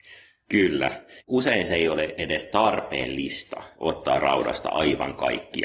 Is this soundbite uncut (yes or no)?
no